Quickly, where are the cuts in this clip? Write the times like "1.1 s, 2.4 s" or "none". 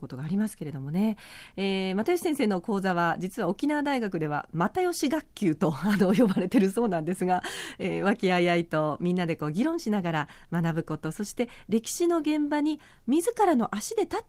none